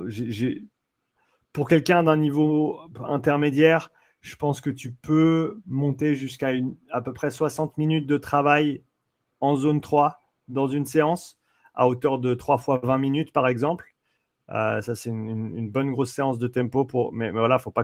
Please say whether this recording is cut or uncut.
uncut